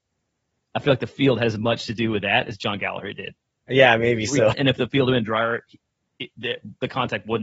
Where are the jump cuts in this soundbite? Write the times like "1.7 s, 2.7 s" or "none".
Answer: 4.5 s